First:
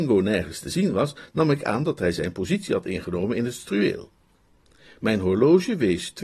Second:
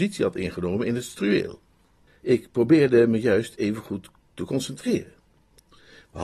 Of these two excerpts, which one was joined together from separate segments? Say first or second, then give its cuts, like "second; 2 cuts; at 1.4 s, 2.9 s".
second; 1 cut; at 2.1 s